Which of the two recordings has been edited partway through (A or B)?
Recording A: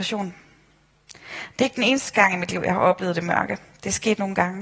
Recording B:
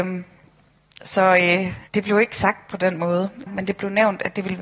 B